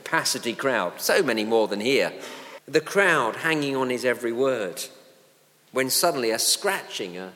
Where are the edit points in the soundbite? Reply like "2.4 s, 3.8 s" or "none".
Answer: 2.6 s